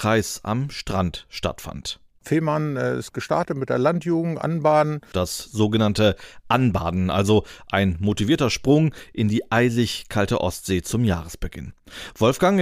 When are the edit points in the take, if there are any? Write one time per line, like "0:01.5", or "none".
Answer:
0:05.1